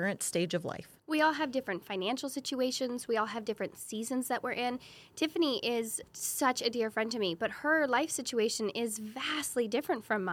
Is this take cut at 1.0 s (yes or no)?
yes